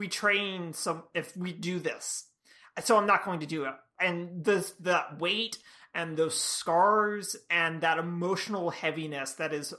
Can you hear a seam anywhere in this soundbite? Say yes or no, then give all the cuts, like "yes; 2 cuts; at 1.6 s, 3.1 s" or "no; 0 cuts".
no; 0 cuts